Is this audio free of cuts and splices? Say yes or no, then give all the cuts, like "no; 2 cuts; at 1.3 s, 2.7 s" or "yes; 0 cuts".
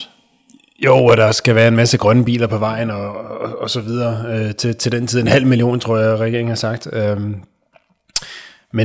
yes; 0 cuts